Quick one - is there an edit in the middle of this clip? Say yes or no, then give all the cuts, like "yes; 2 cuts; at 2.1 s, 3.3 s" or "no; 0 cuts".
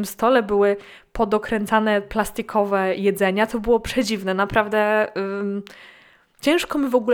no; 0 cuts